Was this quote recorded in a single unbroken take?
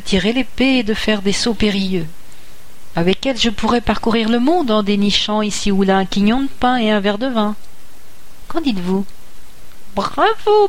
yes; 0 cuts

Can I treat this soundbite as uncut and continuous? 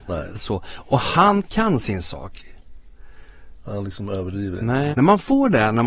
no; 2 cuts; at 3.7 s, 4.9 s

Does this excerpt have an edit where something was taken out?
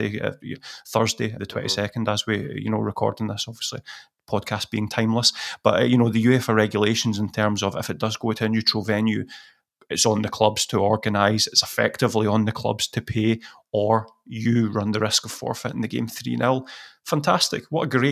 yes; 1 cut; at 1.4 s

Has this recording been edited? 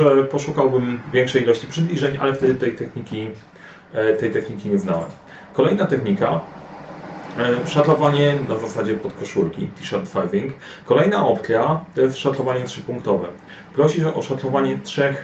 yes; 1 cut; at 10.8 s

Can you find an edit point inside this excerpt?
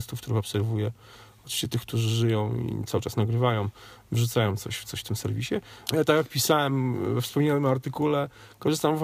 yes; 1 cut; at 5.9 s

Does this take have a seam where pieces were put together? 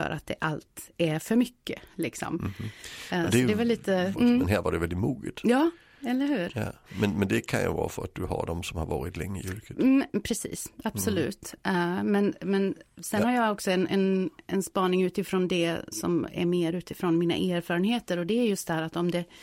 yes; 1 cut; at 4.1 s

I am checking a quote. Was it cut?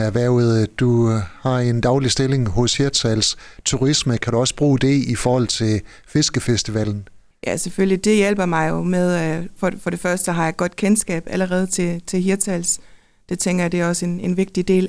no; 0 cuts

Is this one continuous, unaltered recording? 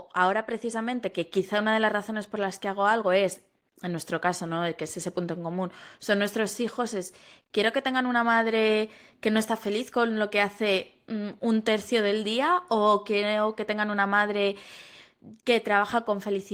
yes; 0 cuts

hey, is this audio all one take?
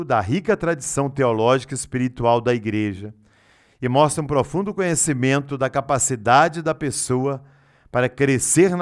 yes; 0 cuts

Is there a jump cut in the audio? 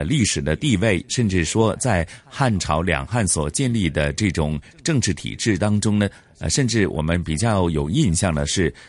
no; 0 cuts

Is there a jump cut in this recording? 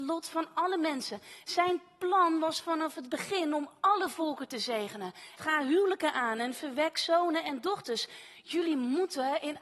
yes; 1 cut; at 5.4 s

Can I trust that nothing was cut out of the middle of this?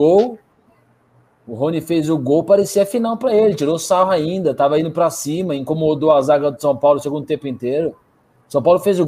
yes; 0 cuts

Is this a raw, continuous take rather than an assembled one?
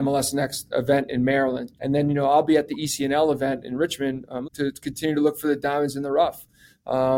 no; 2 cuts; at 1.8 s, 4.4 s

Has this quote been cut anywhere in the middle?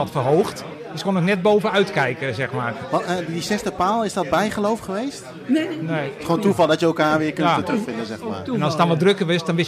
no; 0 cuts

